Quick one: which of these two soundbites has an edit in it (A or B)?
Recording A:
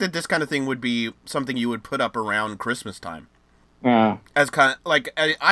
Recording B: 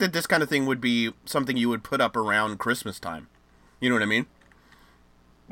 A